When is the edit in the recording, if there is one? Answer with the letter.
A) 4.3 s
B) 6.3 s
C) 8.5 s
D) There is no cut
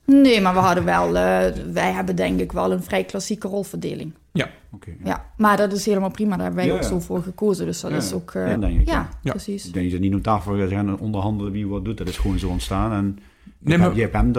C